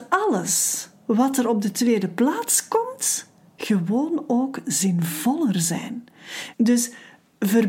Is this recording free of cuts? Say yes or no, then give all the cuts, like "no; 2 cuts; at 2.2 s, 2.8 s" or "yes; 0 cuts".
no; 1 cut; at 6.5 s